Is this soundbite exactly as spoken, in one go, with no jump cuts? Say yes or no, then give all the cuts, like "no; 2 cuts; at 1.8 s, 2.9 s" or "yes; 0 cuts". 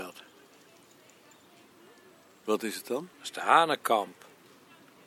no; 1 cut; at 3.1 s